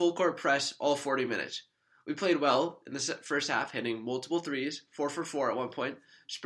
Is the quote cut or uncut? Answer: uncut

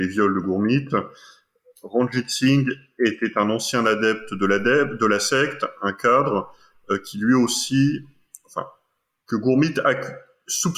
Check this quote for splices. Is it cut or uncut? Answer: uncut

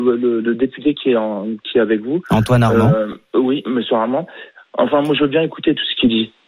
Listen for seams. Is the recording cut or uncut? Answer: uncut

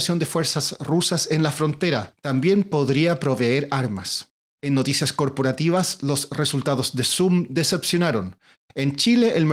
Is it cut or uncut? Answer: cut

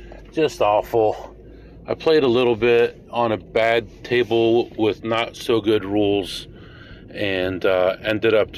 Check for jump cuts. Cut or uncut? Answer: uncut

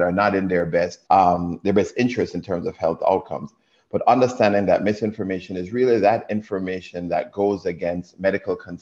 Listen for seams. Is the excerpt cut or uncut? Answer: cut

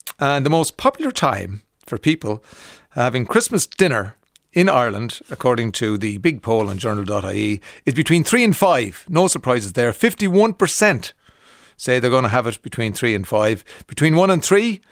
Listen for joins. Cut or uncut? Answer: uncut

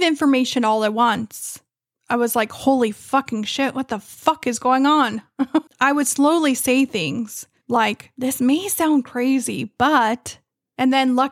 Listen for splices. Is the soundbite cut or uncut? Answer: cut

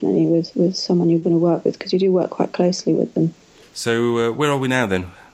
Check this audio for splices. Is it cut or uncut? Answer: cut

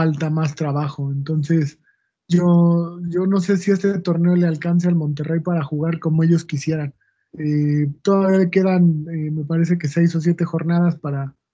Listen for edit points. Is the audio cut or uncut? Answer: uncut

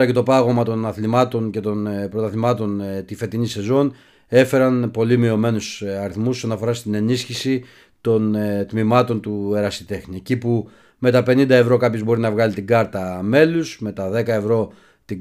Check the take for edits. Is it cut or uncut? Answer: uncut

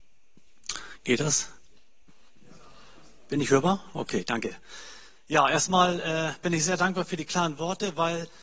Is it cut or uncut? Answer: uncut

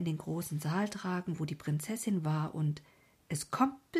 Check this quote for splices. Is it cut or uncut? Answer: uncut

